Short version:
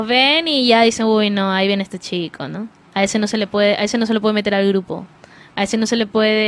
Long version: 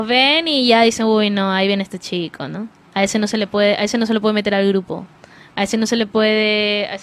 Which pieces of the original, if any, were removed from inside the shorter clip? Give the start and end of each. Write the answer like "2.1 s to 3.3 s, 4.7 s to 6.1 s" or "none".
none

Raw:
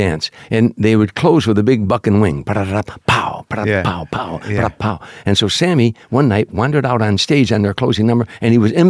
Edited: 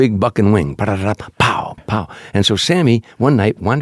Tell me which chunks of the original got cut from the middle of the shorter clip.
3.5 s to 4.7 s

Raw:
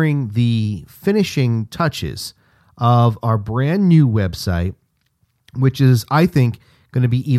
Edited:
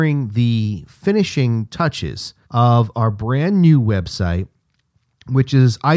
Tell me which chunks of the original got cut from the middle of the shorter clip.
2.4 s to 2.7 s

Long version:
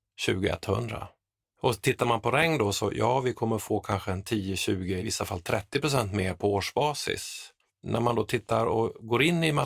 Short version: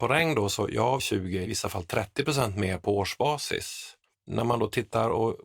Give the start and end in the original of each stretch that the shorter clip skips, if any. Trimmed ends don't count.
3.2 s to 4.5 s

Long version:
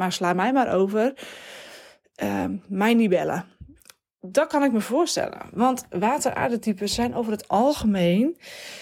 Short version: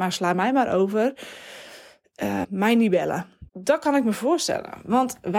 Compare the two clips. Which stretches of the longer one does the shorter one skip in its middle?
2.4 s to 2.6 s, 3.7 s to 4.2 s

